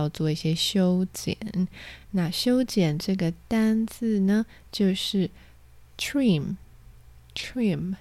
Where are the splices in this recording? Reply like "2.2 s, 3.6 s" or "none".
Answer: none